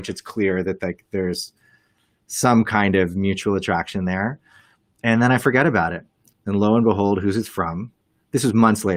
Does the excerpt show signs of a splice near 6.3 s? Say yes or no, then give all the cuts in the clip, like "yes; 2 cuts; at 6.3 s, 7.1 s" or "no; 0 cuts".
yes; 1 cut; at 6.3 s